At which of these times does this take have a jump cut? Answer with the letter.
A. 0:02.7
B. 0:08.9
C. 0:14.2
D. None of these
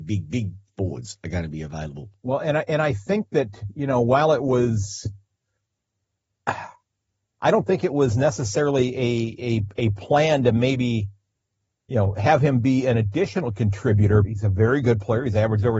C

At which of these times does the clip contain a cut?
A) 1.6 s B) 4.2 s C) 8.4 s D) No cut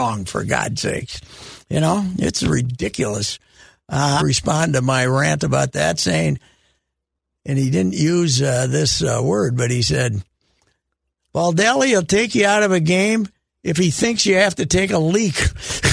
B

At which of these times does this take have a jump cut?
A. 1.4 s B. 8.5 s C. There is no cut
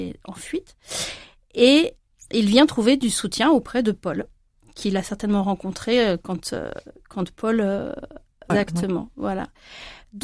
B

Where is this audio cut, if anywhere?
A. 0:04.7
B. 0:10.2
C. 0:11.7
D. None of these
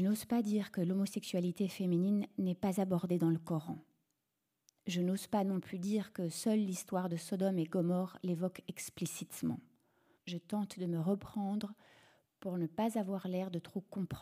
B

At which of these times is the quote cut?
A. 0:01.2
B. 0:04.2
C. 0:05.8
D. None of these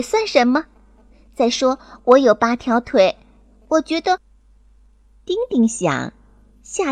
B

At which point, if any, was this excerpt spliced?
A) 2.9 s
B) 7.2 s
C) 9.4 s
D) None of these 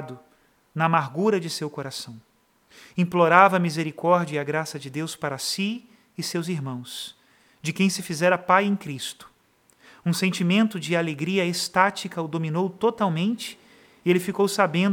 D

